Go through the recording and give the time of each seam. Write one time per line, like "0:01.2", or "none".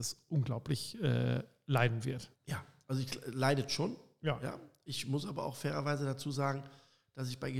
0:02.3